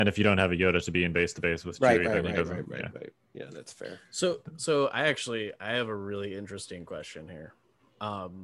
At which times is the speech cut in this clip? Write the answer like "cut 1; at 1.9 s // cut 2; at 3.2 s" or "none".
none